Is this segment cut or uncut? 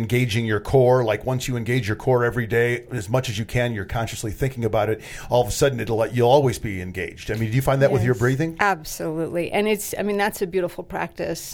uncut